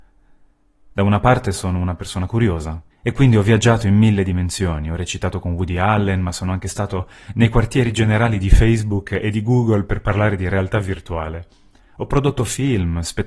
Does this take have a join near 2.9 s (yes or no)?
yes